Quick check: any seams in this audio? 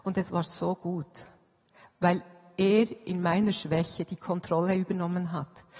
no; 0 cuts

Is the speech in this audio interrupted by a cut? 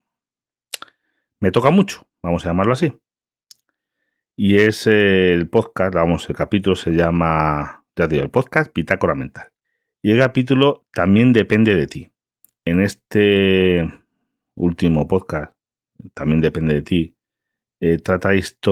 no; 0 cuts

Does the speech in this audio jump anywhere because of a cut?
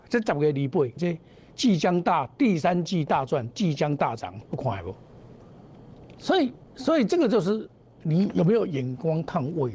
yes; 2 cuts; at 1.0 s, 4.4 s

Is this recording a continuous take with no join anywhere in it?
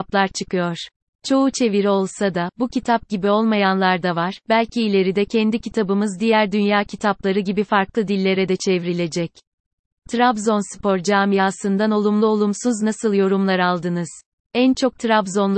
yes; 0 cuts

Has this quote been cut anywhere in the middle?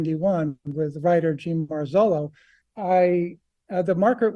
yes; 1 cut; at 2.6 s

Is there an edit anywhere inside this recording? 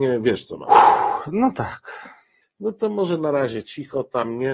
yes; 1 cut; at 2.4 s

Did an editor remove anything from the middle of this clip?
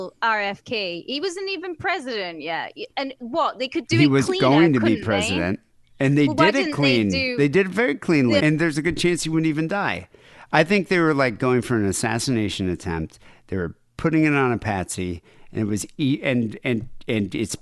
yes; 1 cut; at 8.4 s

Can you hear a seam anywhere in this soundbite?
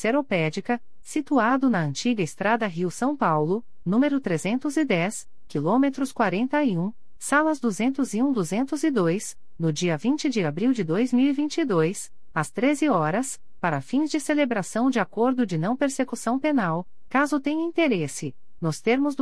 no; 0 cuts

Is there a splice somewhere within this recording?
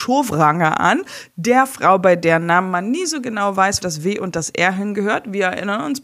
yes; 1 cut; at 3.8 s

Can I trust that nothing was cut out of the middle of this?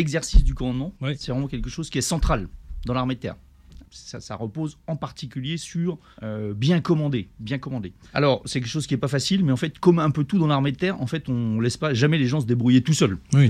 no; 1 cut; at 3.8 s

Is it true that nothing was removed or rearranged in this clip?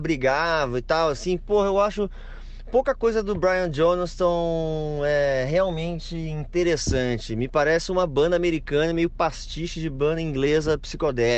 yes; 0 cuts

